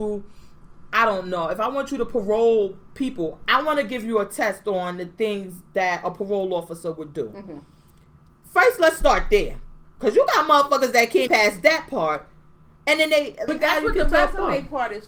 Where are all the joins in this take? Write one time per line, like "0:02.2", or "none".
0:11.3
0:13.5